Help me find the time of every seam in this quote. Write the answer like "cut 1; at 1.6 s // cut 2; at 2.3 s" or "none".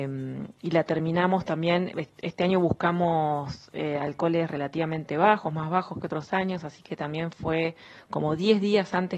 none